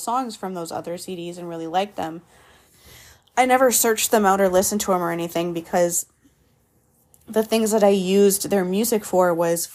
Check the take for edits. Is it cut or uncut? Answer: uncut